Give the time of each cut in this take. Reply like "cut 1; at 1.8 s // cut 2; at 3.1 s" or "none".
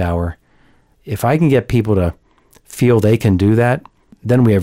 cut 1; at 0.9 s